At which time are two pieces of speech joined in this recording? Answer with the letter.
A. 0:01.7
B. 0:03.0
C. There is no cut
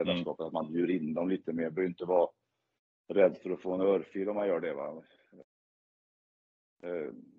C